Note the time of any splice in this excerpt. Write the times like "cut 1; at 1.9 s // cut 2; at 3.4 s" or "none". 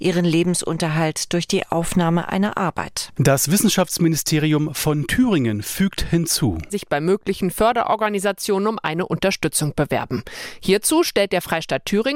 cut 1; at 3.2 s // cut 2; at 6.7 s